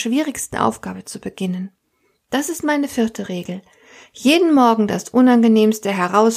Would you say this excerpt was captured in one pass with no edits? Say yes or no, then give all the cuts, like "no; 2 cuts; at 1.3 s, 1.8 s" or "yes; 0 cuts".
yes; 0 cuts